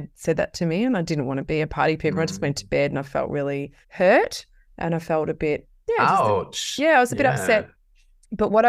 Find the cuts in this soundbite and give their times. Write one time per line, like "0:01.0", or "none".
0:03.8